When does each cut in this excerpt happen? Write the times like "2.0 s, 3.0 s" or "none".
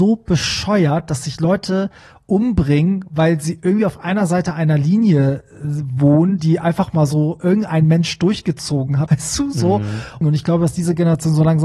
9.1 s, 10.2 s